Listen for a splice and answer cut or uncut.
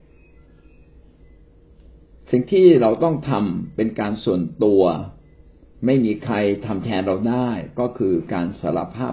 uncut